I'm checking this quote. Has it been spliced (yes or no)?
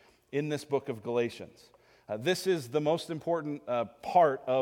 no